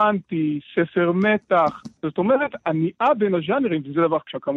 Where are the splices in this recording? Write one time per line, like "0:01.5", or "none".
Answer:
0:02.0